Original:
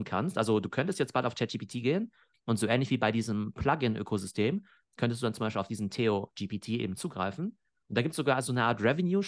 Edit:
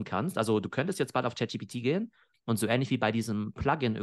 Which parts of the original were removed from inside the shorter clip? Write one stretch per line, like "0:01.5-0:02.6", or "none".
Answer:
none